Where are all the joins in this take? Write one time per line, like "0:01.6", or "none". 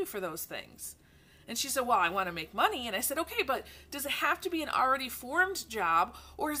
none